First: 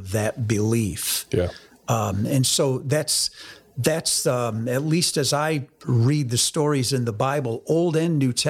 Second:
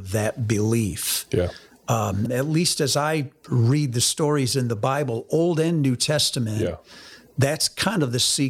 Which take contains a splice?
second; 1 cut; at 2.3 s

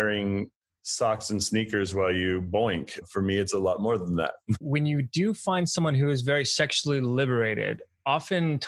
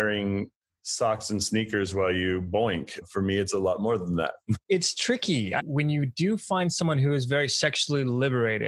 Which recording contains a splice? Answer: first; 1 cut; at 4.6 s

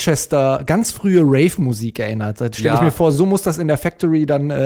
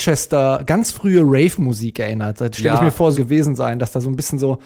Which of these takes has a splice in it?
second; 1 cut; at 3.1 s

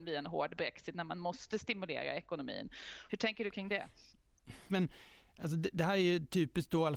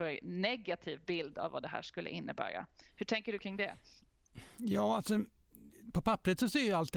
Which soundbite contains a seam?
first; 2 cuts; at 3.1 s, 4.7 s

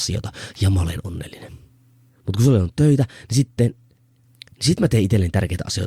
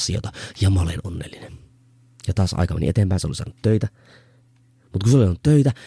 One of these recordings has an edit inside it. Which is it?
first; 2 cuts; at 2.1 s, 4.2 s

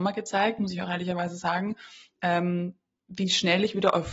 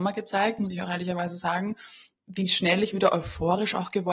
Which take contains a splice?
second; 1 cut; at 2.1 s

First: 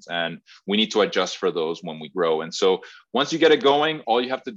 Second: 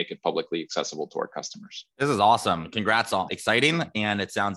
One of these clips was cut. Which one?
second; 2 cuts; at 1.9 s, 3.3 s

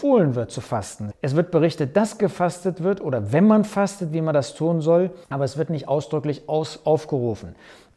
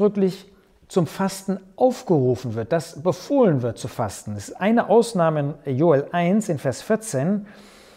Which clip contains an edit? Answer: first; 2 cuts; at 1.1 s, 5.2 s

